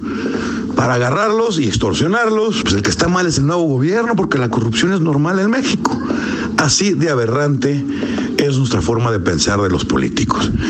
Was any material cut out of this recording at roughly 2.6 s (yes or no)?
yes